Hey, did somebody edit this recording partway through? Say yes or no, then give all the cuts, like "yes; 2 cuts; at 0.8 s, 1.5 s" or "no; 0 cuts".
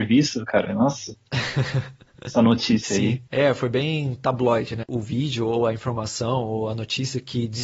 yes; 2 cuts; at 3.3 s, 4.8 s